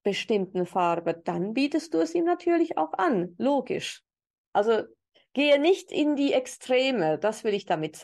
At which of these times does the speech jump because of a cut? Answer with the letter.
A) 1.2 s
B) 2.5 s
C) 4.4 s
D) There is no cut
C